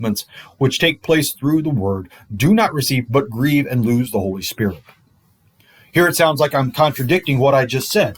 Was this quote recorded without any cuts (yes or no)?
yes